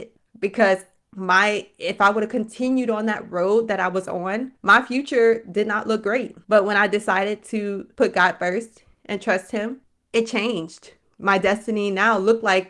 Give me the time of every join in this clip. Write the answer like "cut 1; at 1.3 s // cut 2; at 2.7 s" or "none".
cut 1; at 4.6 s // cut 2; at 6.4 s // cut 3; at 9.9 s